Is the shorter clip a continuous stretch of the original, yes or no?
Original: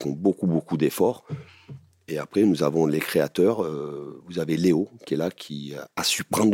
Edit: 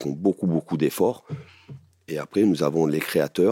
yes